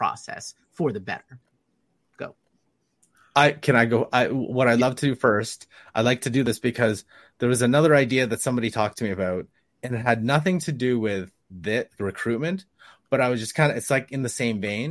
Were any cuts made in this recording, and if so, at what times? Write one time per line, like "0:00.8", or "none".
none